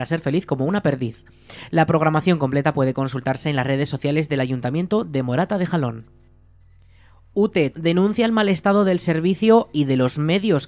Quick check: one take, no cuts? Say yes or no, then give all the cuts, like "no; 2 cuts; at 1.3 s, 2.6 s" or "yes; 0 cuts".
no; 1 cut; at 7.7 s